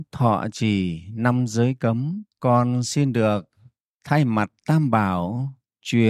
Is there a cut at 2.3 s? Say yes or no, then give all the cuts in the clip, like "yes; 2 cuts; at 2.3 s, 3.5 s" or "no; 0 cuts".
yes; 1 cut; at 2.3 s